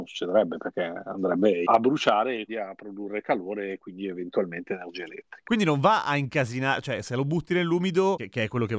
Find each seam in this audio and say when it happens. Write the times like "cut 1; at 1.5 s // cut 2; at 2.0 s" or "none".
cut 1; at 2.5 s